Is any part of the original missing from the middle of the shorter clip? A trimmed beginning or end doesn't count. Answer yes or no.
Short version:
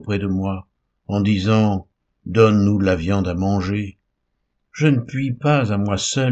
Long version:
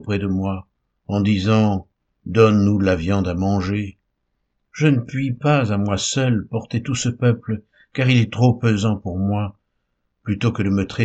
no